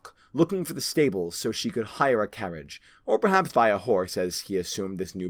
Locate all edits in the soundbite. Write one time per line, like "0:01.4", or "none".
0:03.5